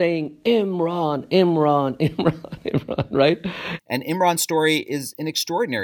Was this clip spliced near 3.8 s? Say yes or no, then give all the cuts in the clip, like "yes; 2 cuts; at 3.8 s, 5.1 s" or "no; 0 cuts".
yes; 1 cut; at 3.8 s